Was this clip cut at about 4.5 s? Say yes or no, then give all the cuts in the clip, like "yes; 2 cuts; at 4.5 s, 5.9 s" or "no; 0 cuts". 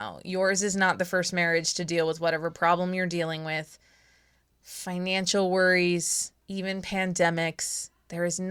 yes; 2 cuts; at 4.5 s, 6.4 s